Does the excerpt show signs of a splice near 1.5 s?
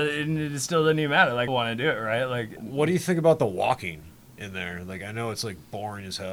yes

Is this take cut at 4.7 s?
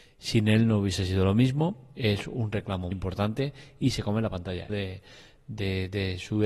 yes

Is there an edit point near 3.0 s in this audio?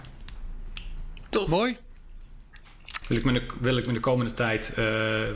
yes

